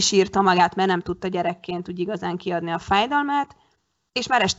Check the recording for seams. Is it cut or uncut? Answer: uncut